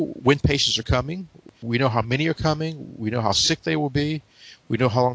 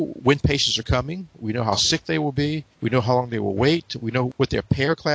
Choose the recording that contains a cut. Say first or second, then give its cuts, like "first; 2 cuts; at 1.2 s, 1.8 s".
second; 2 cuts; at 1.4 s, 2.7 s